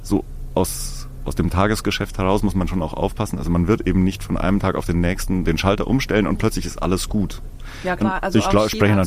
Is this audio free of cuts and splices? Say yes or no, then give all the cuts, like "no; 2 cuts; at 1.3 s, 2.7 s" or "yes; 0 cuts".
no; 1 cut; at 8.0 s